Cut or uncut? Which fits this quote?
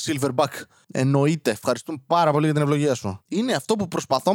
uncut